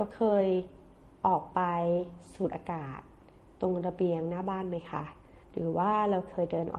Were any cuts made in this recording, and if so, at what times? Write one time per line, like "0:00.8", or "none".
0:05.4